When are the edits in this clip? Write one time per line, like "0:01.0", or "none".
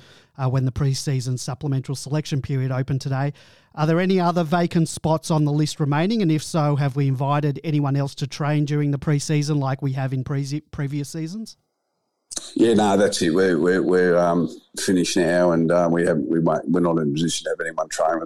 none